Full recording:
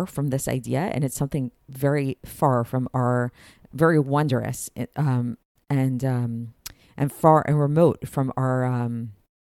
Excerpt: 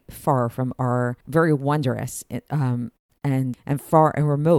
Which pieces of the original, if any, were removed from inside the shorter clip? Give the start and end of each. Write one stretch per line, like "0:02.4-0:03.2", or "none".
0:03.4-0:03.7
0:06.0-0:06.8